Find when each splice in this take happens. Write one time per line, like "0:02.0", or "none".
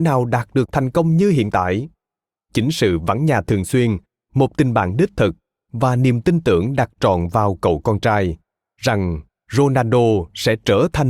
0:02.4